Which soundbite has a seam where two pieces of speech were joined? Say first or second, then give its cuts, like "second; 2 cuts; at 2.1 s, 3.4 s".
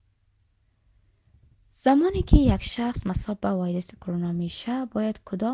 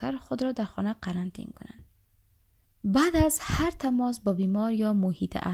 second; 1 cut; at 2.7 s